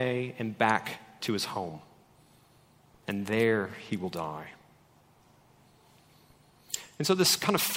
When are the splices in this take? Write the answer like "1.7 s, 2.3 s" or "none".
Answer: none